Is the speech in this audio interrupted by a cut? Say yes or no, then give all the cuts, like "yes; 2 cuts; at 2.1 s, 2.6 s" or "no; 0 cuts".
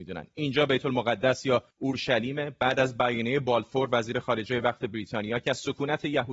yes; 1 cut; at 1.7 s